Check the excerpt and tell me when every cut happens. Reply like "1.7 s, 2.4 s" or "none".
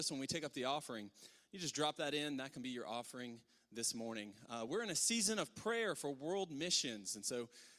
none